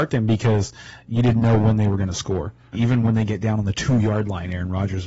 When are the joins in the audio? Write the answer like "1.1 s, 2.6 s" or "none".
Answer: 2.7 s